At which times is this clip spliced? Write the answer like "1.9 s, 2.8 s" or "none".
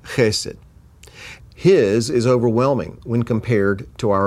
1.4 s